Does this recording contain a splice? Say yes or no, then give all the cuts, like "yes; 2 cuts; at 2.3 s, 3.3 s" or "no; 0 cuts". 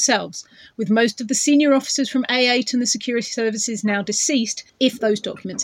yes; 1 cut; at 4.7 s